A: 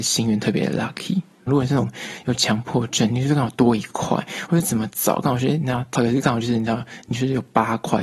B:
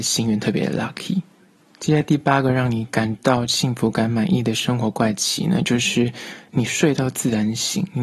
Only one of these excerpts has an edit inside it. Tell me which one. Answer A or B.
A